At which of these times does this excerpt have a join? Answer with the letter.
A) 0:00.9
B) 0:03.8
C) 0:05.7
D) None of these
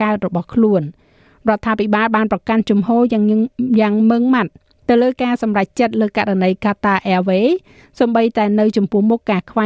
D